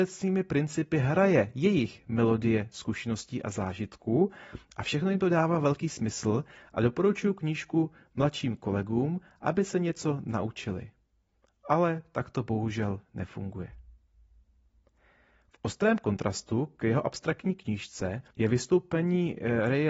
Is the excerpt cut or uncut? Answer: cut